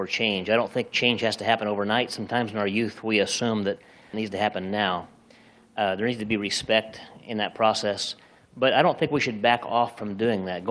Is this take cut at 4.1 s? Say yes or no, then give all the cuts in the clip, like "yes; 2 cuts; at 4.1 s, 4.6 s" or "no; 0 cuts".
yes; 1 cut; at 4.1 s